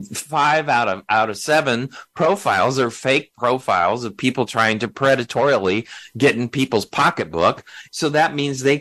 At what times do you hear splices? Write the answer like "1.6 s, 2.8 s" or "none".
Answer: 7.9 s